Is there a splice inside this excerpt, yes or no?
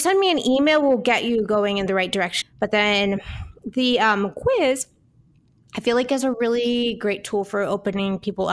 yes